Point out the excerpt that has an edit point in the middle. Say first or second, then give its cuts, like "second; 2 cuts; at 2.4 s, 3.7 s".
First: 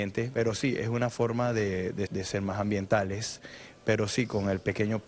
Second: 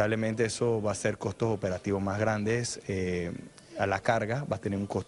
first; 1 cut; at 2.1 s